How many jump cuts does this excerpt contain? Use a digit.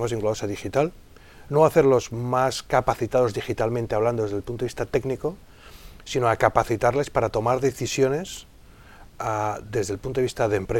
1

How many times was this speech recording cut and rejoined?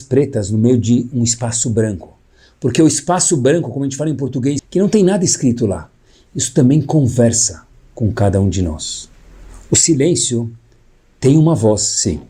1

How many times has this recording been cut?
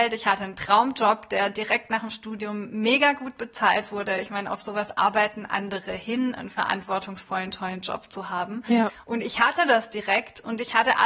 0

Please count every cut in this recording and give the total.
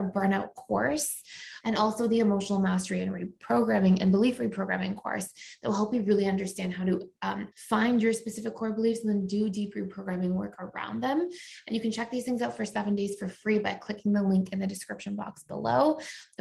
2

